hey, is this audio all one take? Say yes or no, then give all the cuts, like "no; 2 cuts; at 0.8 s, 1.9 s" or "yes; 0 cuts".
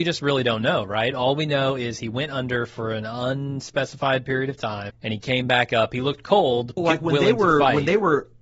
no; 2 cuts; at 4.9 s, 6.8 s